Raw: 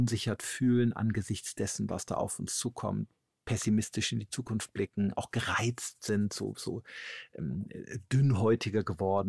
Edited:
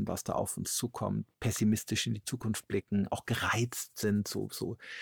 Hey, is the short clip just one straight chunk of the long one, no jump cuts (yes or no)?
no